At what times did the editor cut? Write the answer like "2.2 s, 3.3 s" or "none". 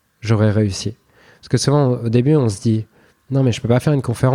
none